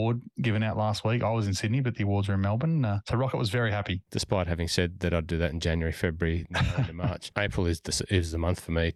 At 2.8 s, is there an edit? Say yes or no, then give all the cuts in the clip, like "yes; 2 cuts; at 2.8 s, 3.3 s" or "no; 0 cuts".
no; 2 cuts; at 4.1 s, 7.3 s